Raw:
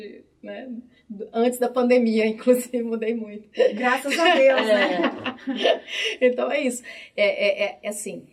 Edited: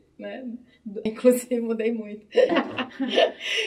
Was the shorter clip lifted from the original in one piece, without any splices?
no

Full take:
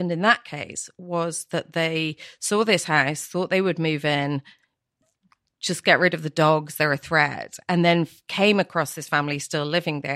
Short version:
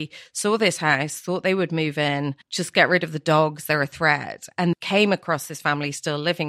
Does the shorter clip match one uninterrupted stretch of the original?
no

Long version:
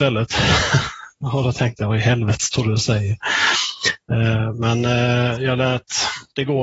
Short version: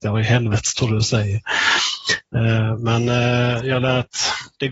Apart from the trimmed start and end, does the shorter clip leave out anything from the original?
no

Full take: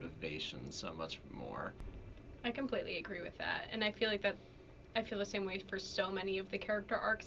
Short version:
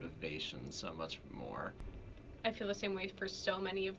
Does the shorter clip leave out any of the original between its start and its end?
yes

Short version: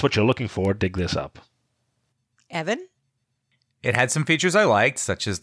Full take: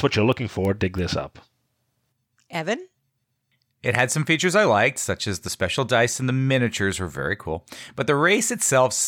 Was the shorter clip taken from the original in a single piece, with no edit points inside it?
yes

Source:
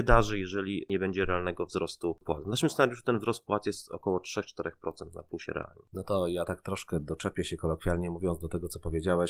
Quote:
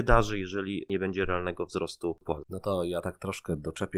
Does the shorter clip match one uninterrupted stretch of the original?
no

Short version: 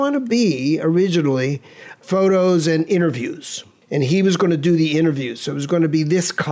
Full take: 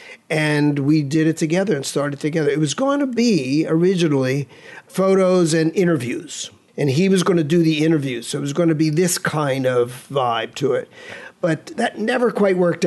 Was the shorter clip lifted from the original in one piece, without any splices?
yes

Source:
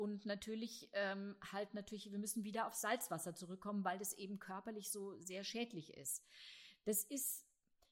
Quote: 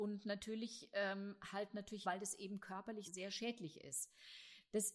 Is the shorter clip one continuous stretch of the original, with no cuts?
no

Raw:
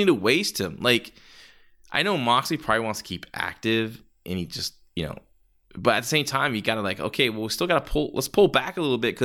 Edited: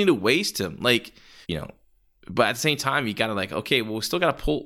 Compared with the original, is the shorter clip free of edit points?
no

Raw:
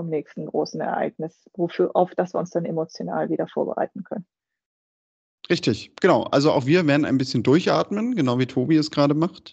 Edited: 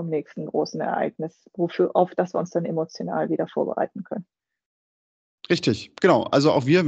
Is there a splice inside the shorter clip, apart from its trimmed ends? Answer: no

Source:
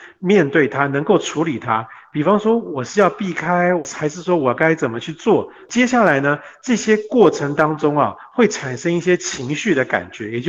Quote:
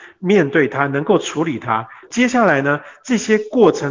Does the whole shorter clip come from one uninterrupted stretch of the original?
no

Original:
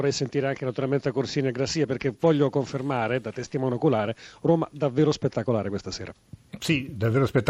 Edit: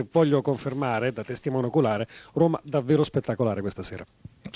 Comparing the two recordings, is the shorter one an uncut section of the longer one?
yes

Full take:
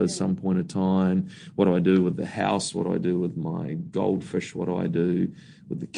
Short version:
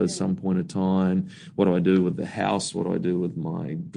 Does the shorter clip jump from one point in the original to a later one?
no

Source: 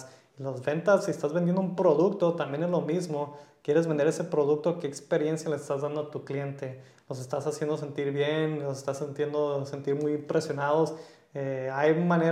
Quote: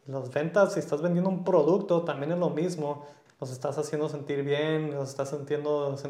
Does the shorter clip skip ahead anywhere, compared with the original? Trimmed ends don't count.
yes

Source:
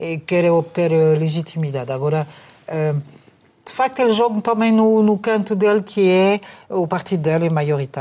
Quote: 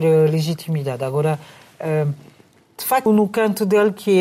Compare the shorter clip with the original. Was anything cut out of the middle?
yes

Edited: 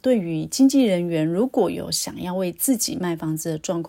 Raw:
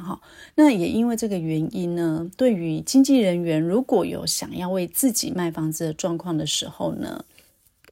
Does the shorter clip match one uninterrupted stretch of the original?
yes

